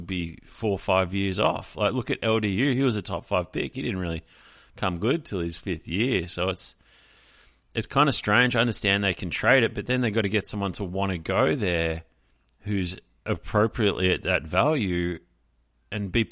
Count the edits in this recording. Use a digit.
0